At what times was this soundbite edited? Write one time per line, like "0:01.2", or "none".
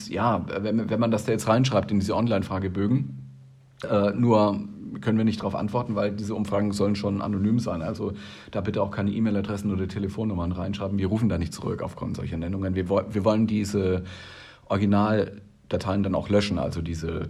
0:03.8